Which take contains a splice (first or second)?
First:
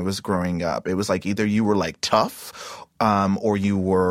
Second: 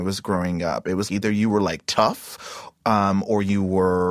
second